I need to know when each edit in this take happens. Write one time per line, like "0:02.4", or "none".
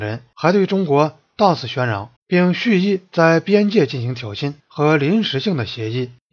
0:02.2
0:04.6